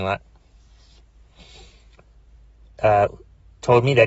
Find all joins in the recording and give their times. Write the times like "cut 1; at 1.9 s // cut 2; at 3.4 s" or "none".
none